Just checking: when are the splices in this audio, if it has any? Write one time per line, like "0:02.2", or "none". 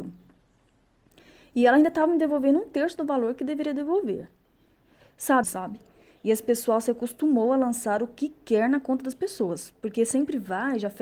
0:05.4